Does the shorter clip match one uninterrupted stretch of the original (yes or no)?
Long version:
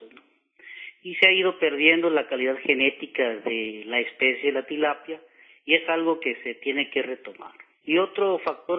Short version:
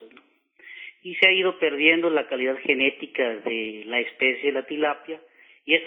yes